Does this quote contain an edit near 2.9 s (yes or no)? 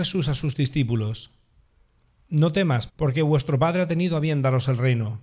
yes